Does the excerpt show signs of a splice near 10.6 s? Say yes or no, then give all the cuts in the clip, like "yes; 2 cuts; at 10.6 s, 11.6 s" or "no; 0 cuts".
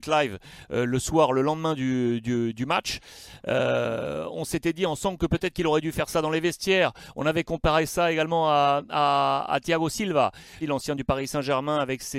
yes; 1 cut; at 10.6 s